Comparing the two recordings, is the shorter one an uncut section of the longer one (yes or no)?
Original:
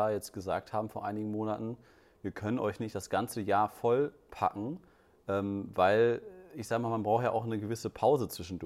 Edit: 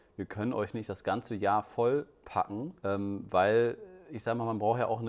no